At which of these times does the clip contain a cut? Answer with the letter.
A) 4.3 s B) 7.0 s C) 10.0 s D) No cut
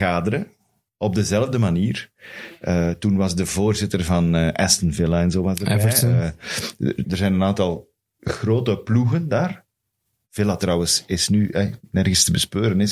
B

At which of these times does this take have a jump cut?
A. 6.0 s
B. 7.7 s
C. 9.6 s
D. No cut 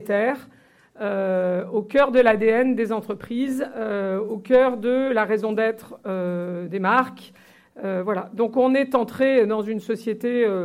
D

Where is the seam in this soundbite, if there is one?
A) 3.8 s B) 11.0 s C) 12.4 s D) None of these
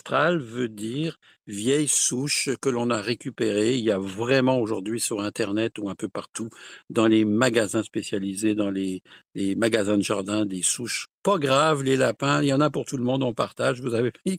B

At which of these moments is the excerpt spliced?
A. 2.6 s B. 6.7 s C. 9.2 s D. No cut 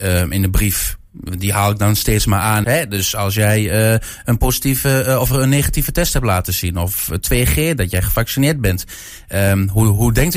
A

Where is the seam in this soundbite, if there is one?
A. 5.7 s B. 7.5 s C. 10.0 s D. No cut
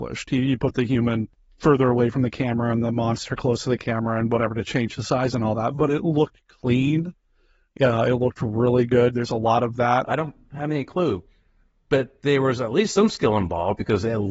C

